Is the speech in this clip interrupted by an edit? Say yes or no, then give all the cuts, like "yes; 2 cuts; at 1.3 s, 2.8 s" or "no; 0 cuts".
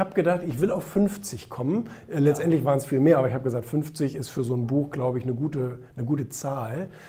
no; 0 cuts